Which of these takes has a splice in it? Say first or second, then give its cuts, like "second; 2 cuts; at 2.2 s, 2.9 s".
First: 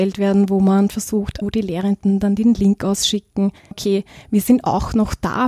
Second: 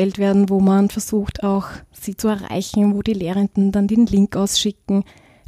first; 2 cuts; at 1.4 s, 3.7 s